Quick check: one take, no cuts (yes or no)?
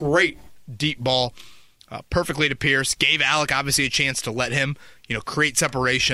yes